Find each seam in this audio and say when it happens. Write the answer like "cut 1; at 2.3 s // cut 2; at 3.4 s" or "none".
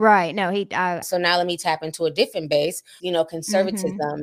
cut 1; at 1.0 s // cut 2; at 3.0 s